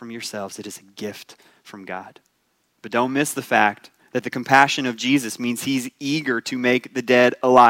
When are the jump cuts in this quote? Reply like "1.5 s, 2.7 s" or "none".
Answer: 2.8 s